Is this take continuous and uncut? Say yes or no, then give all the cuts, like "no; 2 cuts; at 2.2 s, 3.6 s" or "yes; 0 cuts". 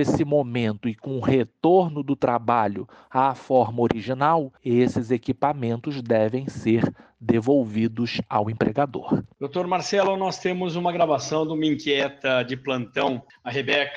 yes; 0 cuts